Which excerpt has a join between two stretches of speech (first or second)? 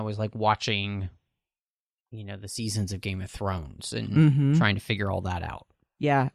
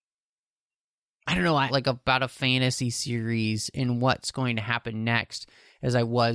second